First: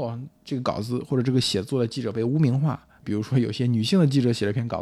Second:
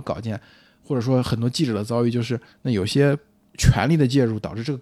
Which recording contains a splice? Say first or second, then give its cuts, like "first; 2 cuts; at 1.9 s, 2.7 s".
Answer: first; 1 cut; at 3.0 s